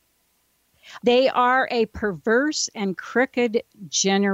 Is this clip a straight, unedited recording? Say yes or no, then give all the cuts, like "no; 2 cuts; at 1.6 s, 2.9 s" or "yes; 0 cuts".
no; 1 cut; at 1.0 s